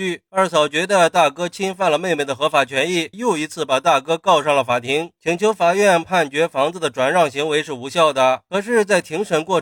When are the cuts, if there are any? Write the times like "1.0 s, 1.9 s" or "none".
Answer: 3.1 s